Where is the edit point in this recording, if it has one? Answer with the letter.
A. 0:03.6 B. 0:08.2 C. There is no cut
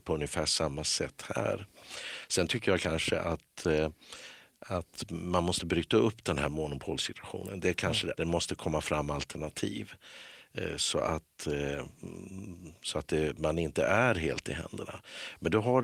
B